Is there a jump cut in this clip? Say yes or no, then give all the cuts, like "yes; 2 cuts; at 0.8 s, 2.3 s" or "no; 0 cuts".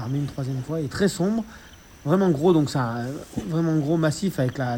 no; 0 cuts